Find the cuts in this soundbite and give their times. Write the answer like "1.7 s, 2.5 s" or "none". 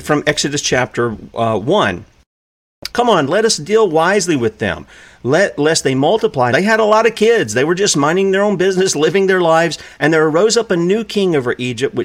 2.9 s, 6.5 s, 10.0 s